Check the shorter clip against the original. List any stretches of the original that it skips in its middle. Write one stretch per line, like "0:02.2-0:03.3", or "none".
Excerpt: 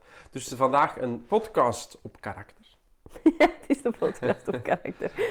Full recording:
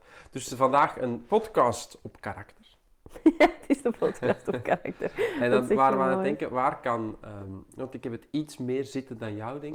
none